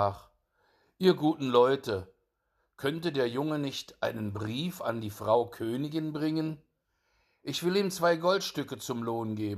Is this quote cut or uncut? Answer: uncut